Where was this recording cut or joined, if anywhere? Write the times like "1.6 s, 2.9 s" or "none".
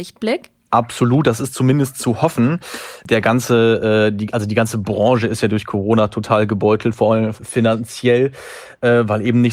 7.4 s